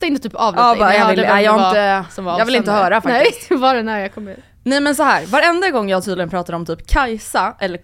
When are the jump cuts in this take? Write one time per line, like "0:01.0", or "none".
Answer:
none